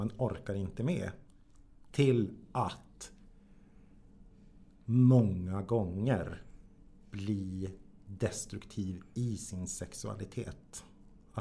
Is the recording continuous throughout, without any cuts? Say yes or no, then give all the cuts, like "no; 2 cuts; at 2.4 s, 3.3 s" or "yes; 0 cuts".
no; 1 cut; at 1.9 s